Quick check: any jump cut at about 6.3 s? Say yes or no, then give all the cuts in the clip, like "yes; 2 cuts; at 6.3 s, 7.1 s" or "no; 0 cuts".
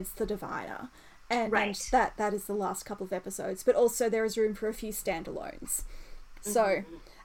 no; 0 cuts